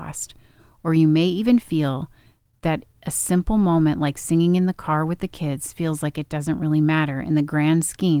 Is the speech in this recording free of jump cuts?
yes; 0 cuts

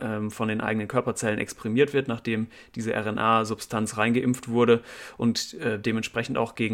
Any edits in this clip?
no; 0 cuts

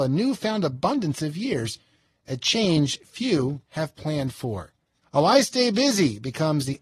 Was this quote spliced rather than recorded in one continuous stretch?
yes; 1 cut; at 5.0 s

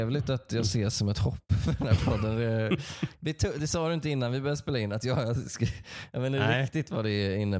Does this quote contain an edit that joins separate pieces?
no; 0 cuts

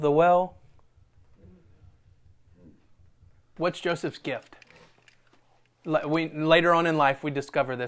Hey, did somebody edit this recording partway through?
yes; 1 cut; at 3.6 s

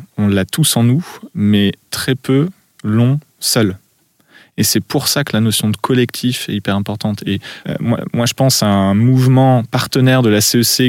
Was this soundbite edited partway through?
no; 0 cuts

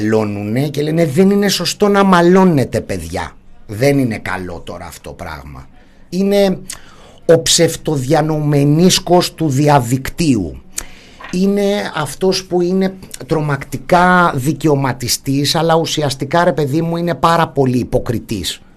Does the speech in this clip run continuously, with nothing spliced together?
no; 1 cut; at 6.1 s

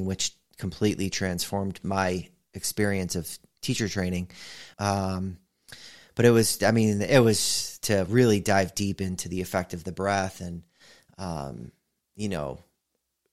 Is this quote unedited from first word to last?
no; 2 cuts; at 4.7 s, 7.8 s

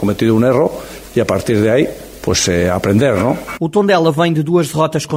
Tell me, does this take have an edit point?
yes; 1 cut; at 3.6 s

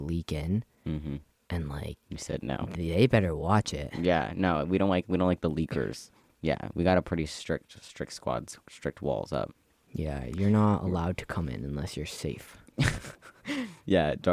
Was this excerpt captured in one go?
yes; 0 cuts

